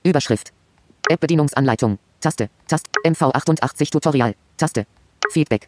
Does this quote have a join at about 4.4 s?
no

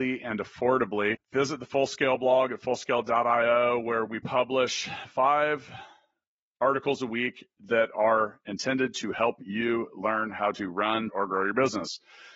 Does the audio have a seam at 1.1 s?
yes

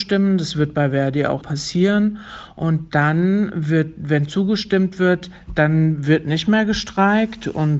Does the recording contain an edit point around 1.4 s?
yes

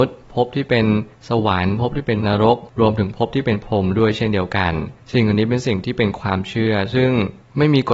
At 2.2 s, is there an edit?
yes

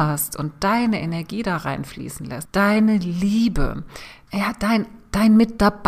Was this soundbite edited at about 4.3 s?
yes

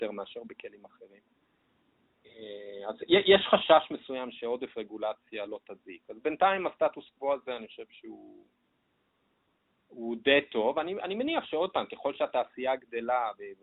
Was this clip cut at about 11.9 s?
no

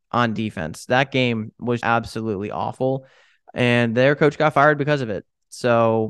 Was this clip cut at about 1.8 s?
yes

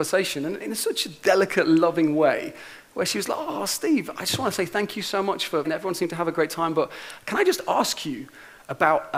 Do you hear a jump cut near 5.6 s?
yes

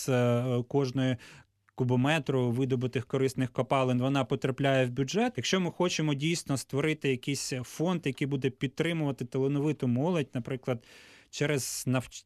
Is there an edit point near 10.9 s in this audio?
no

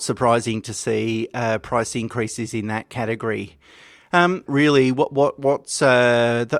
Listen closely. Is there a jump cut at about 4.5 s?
yes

